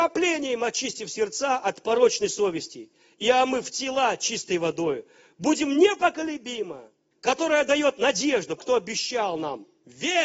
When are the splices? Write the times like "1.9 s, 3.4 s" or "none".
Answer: 7.1 s, 8.6 s